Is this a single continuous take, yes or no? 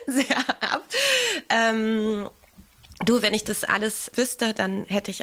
yes